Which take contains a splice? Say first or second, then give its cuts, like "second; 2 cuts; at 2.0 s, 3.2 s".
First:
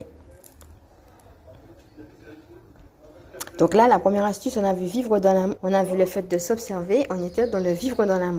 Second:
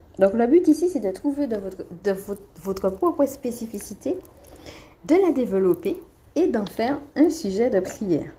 first; 1 cut; at 5.6 s